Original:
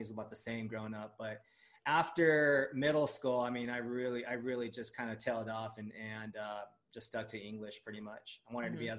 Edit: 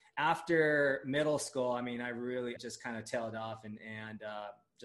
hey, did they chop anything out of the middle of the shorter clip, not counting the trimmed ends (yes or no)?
yes